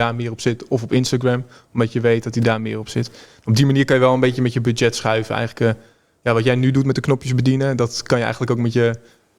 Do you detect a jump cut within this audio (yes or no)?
no